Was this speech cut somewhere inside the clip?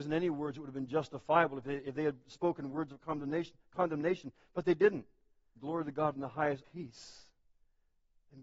yes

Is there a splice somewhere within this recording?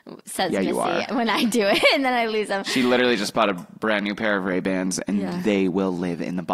no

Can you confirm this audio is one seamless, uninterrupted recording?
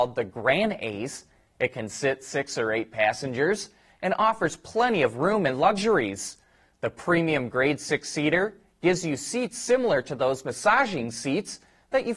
yes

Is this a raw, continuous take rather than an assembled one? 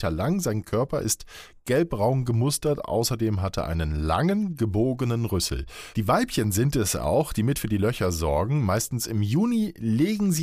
no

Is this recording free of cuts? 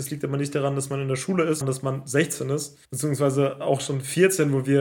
no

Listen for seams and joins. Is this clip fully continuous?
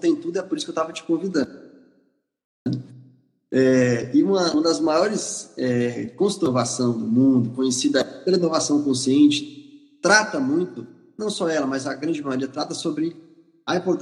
yes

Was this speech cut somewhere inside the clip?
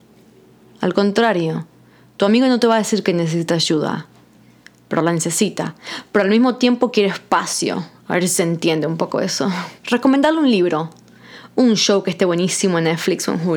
yes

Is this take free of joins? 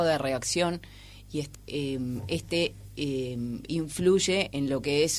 no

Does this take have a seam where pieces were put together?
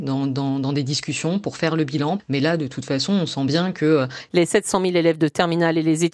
yes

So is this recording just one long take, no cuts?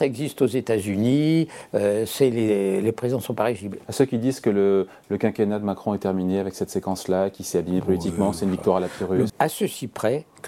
no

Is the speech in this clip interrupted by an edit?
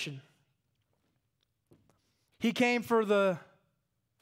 yes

